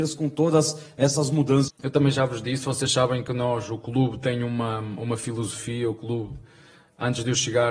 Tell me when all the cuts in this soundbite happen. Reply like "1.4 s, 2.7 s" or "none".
1.7 s

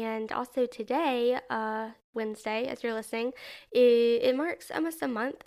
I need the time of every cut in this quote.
none

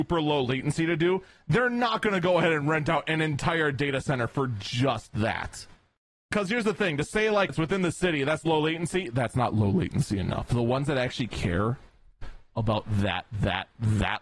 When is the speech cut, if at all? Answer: 7.5 s

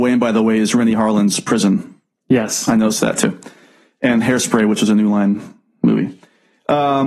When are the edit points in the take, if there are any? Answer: none

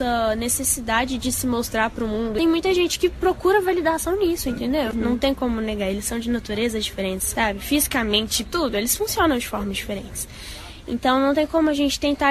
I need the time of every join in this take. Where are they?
4.9 s, 8.4 s

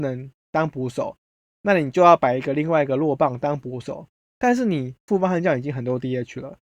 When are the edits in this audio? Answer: none

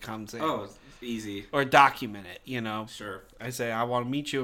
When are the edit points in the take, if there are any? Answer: 3.3 s

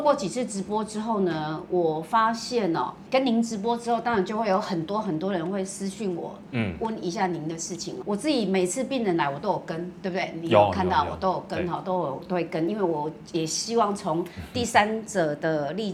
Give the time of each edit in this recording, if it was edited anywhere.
8.0 s

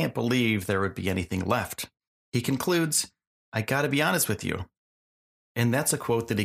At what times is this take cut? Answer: 5.4 s

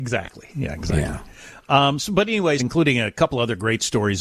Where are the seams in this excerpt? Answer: 2.6 s

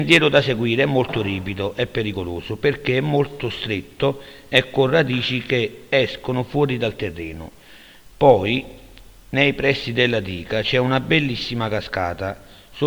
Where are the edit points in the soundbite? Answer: 8.1 s

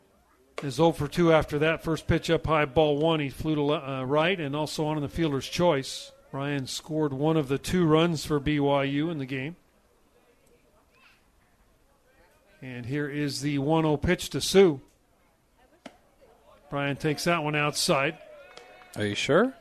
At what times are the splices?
6.2 s

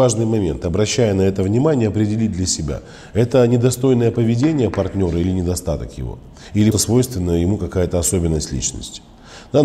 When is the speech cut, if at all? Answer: 6.7 s

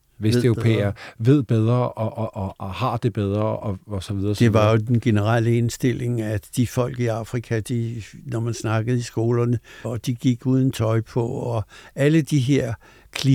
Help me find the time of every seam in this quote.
9.8 s

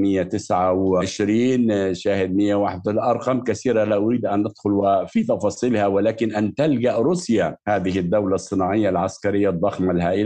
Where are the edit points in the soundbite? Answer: 7.6 s

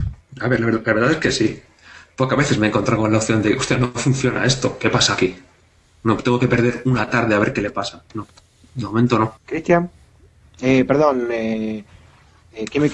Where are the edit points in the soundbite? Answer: 9.4 s

